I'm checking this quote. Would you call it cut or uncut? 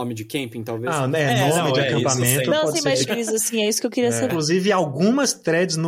cut